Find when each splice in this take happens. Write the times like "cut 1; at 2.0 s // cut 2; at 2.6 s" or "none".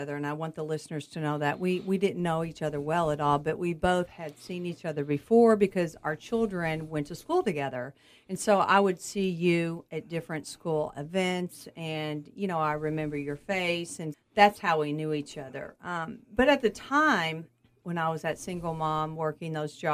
cut 1; at 14.1 s // cut 2; at 16.2 s